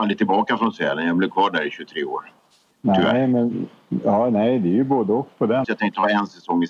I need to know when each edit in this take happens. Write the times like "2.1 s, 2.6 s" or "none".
2.7 s, 5.6 s